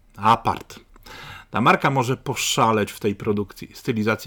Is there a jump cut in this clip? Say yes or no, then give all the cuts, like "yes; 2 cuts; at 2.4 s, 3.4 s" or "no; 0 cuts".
no; 0 cuts